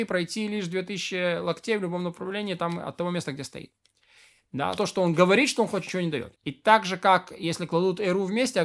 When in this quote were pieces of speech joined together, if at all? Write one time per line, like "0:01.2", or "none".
0:04.8
0:06.4